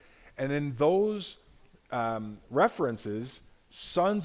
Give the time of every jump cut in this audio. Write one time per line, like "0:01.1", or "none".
none